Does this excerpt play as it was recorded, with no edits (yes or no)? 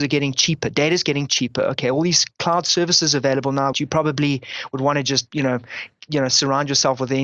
no